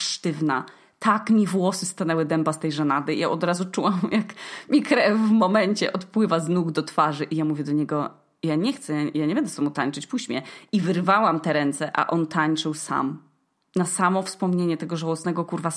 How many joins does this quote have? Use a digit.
0